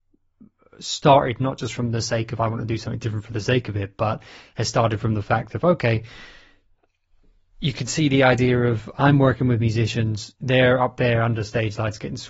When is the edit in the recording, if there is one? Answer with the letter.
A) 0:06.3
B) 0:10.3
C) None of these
B